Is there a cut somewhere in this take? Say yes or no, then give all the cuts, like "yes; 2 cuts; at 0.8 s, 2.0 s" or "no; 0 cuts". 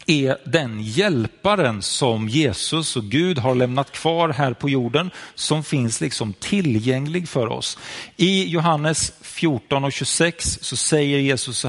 no; 0 cuts